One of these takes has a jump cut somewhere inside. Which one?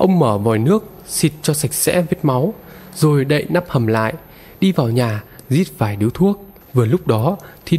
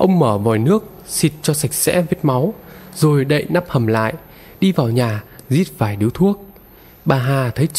first; 1 cut; at 6.6 s

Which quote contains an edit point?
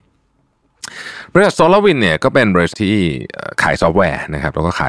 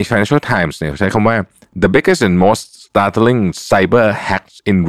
first; 1 cut; at 2.7 s

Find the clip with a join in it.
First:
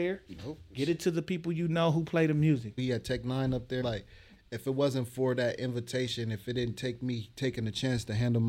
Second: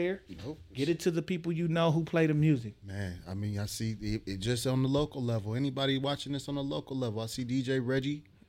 first; 2 cuts; at 2.8 s, 3.8 s

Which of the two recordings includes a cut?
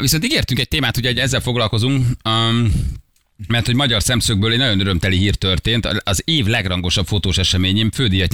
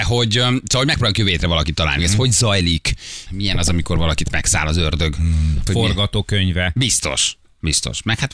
second; 3 cuts; at 2.0 s, 3.3 s, 5.7 s

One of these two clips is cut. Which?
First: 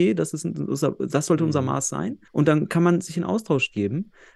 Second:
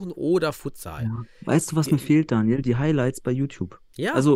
first; 1 cut; at 2.3 s

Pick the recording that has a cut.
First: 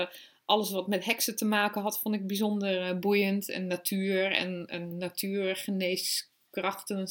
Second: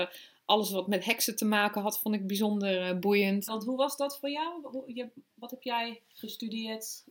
second; 1 cut; at 3.5 s

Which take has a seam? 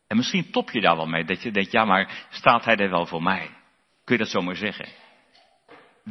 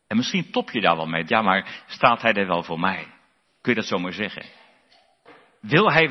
second; 1 cut; at 1.3 s

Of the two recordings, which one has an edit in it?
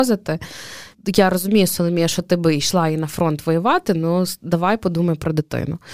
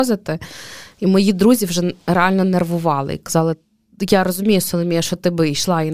first; 1 cut; at 0.9 s

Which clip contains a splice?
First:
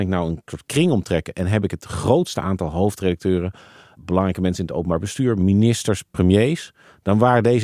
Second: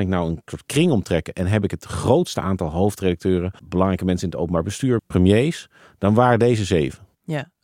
second; 2 cuts; at 3.6 s, 5.0 s

